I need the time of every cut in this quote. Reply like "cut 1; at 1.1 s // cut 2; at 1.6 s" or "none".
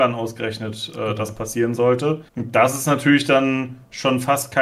cut 1; at 2.3 s